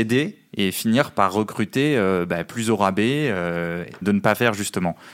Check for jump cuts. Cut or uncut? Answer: cut